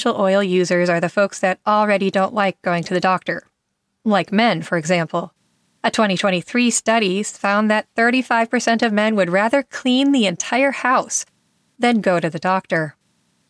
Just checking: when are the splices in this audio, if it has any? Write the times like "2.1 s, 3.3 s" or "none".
none